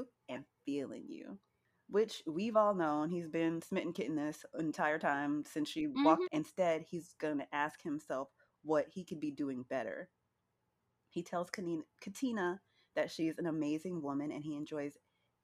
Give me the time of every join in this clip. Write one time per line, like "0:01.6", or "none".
0:06.2